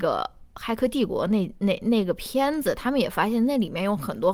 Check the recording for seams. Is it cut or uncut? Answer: uncut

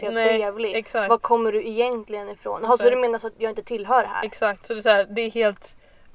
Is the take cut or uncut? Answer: uncut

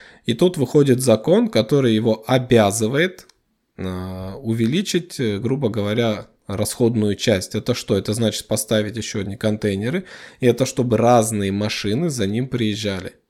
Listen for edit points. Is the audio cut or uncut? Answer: uncut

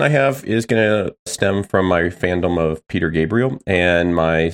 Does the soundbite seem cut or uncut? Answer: uncut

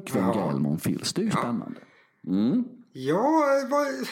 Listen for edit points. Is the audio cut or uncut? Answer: uncut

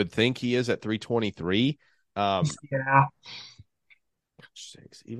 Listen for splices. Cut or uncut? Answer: cut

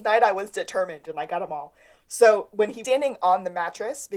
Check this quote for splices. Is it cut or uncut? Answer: uncut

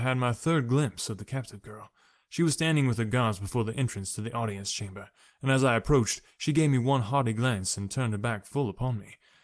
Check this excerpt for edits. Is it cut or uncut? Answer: uncut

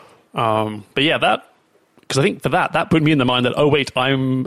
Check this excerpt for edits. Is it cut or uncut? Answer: uncut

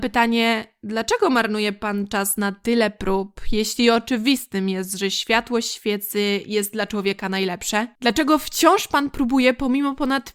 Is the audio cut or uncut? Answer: uncut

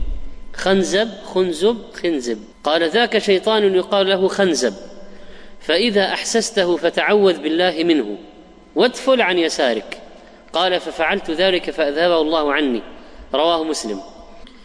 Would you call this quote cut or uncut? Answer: cut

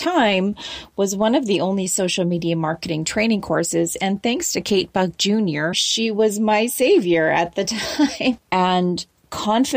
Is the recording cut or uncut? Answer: cut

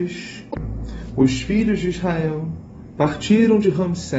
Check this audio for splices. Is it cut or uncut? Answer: uncut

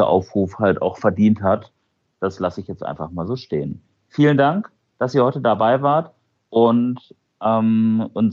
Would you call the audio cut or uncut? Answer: cut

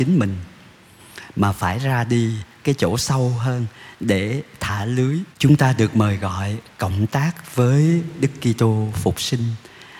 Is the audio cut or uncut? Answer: cut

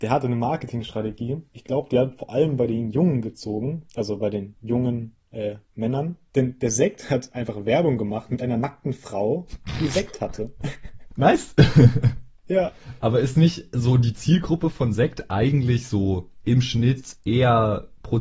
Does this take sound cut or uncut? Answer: uncut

